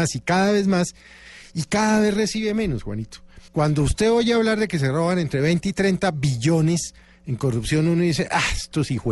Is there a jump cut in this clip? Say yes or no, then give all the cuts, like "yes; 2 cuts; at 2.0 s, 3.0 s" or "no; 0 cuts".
yes; 1 cut; at 3.5 s